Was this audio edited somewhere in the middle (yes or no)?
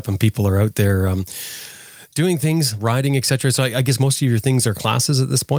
no